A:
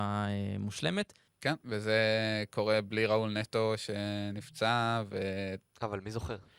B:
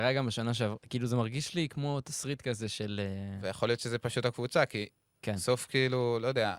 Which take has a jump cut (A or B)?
A